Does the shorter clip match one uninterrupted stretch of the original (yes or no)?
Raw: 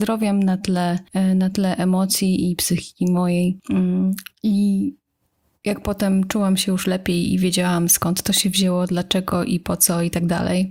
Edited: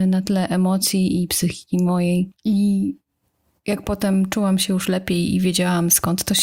no